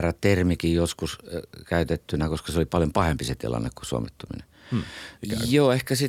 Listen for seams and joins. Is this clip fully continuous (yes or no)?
no